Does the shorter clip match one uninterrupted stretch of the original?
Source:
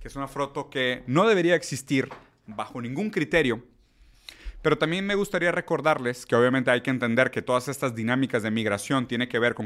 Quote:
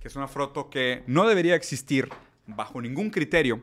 yes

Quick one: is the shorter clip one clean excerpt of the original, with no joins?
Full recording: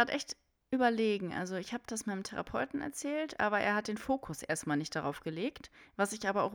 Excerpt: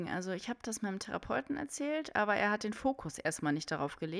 yes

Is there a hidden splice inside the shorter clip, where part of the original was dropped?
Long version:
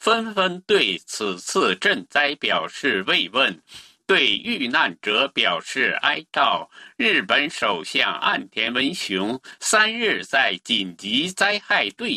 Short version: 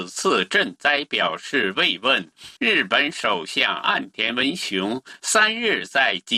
yes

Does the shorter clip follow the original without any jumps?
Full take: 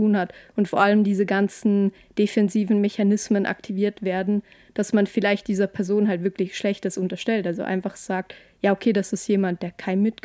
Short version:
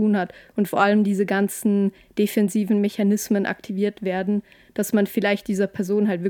yes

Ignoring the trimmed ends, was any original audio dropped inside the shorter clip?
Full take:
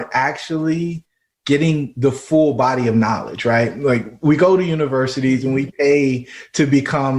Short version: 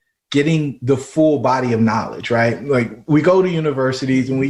no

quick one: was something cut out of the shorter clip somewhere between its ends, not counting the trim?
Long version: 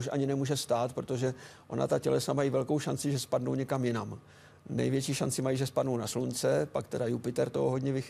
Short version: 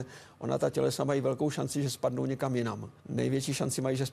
yes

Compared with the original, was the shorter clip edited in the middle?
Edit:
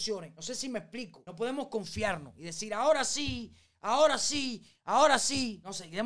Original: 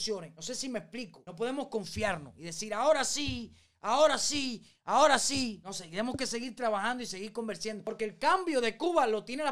no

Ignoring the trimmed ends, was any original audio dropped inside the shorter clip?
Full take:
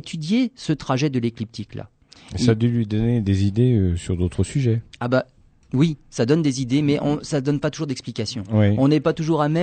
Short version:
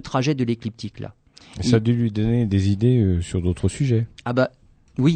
no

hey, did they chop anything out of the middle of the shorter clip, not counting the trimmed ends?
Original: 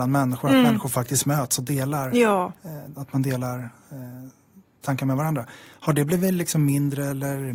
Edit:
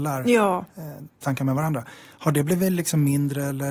yes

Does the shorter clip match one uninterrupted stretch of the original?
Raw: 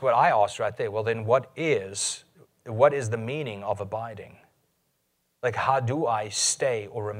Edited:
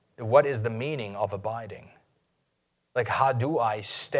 yes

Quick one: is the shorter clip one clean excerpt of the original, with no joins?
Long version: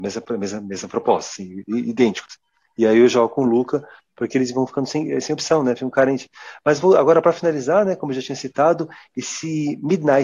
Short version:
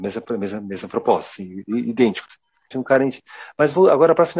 no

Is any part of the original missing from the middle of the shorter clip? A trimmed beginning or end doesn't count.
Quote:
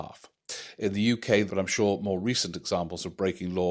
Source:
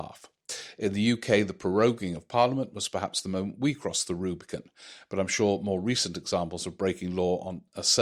yes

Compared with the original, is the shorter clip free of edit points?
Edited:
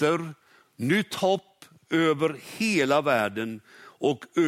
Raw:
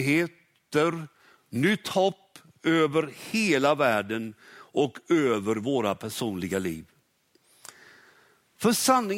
yes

